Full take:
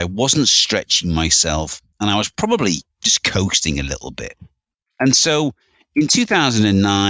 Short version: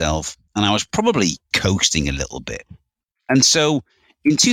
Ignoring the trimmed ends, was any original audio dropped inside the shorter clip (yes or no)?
yes